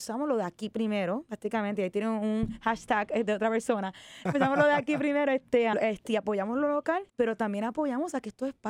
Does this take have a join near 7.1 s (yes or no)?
yes